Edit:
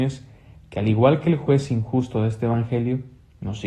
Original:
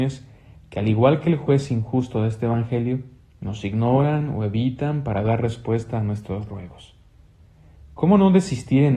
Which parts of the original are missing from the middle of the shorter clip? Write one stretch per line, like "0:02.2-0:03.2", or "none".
none

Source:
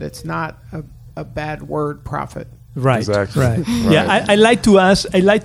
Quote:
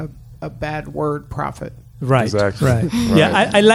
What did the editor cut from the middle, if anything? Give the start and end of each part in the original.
none

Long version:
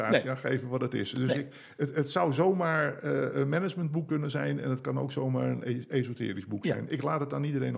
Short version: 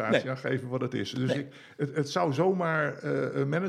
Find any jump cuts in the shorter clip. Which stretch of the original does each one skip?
none

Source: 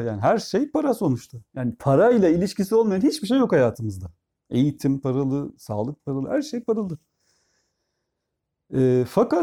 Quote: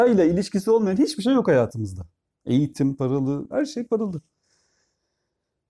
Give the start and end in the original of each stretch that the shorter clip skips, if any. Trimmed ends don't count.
0:05.5-0:06.3

